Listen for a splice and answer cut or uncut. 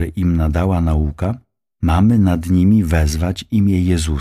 uncut